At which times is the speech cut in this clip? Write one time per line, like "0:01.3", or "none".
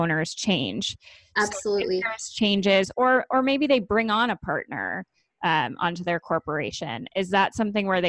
none